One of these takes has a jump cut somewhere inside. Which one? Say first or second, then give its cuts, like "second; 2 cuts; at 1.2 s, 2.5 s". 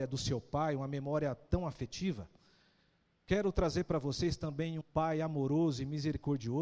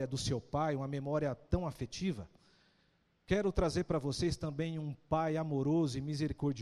first; 1 cut; at 4.8 s